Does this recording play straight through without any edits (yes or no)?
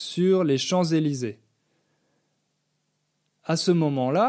yes